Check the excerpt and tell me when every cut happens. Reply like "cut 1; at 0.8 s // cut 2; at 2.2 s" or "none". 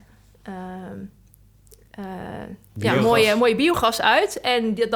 none